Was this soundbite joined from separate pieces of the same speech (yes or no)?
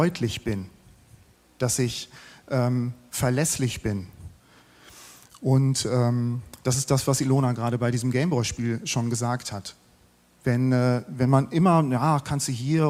no